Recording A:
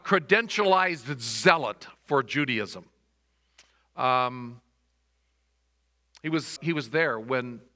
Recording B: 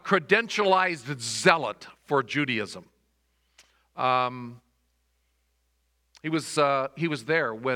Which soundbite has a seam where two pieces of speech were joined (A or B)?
A